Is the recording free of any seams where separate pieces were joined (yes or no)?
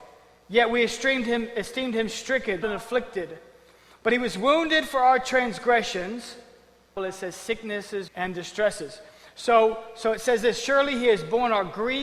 no